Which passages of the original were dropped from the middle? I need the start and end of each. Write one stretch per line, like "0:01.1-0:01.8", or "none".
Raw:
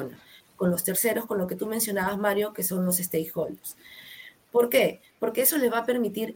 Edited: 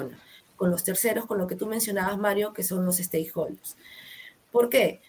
none